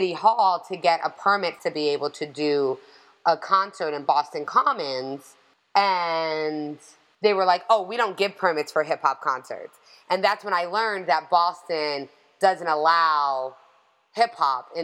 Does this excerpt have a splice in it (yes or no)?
no